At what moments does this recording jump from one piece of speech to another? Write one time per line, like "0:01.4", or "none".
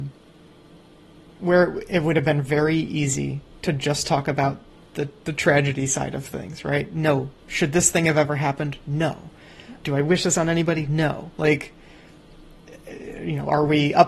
0:01.3

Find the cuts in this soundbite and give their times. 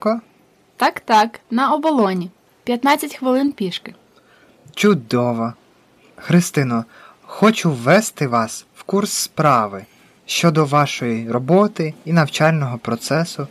none

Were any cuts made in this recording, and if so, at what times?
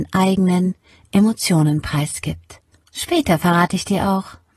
0:02.9

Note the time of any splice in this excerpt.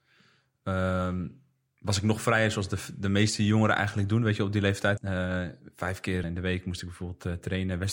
0:05.0
0:06.2

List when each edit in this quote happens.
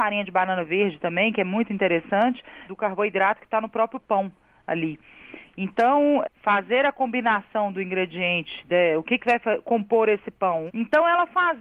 0:02.7
0:06.2
0:10.7

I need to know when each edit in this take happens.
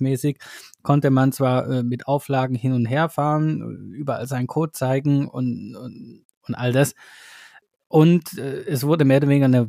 none

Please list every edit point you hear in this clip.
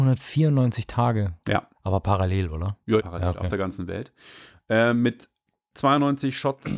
0:03.0

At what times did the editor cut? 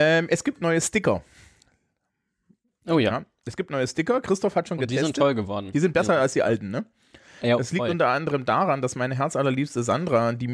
none

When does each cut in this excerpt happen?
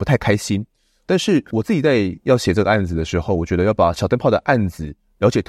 none

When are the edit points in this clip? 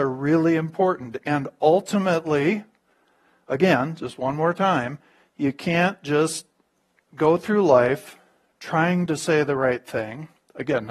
none

